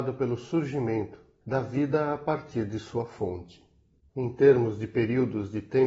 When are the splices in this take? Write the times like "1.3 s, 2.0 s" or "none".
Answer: 1.4 s, 4.1 s